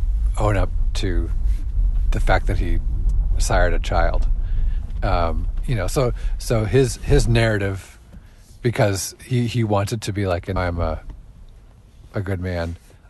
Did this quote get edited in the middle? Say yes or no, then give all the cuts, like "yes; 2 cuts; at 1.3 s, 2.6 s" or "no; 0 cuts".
yes; 2 cuts; at 5.6 s, 10.6 s